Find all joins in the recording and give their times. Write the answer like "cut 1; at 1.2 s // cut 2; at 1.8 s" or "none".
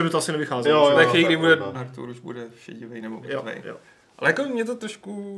cut 1; at 1.7 s